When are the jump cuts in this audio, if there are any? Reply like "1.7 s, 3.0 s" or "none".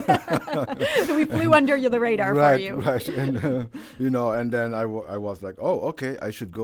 none